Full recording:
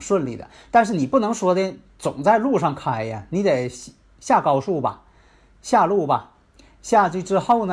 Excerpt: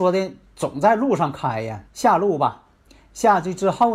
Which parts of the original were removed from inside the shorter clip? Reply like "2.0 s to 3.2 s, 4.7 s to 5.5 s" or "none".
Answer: 3.3 s to 5.5 s